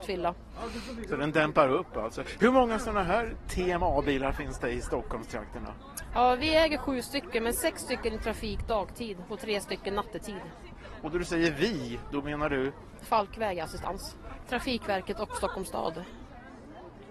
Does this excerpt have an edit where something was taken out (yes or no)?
yes